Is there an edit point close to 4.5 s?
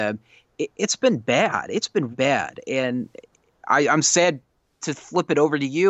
no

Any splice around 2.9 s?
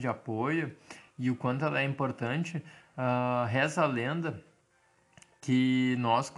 no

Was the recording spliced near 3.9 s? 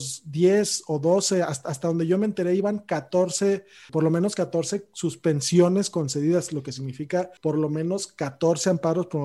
yes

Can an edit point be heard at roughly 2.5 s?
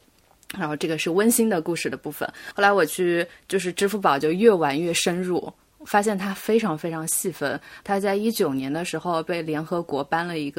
no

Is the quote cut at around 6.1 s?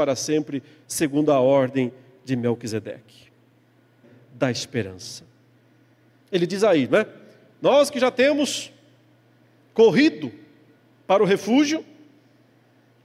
yes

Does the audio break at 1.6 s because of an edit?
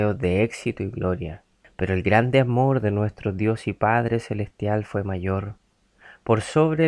yes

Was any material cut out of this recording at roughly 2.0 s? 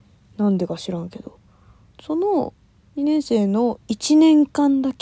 yes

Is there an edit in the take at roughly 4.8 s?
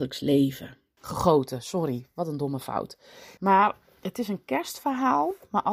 no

